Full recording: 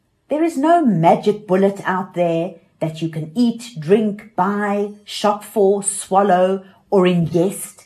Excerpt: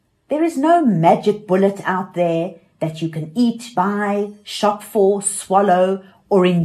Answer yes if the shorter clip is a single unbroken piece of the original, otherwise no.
no